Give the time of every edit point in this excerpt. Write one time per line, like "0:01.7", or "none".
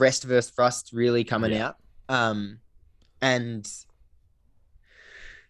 none